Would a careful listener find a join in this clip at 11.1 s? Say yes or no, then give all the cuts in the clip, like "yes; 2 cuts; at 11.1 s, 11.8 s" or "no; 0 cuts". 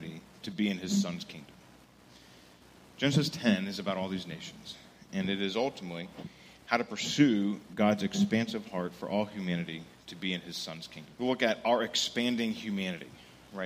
yes; 1 cut; at 11.1 s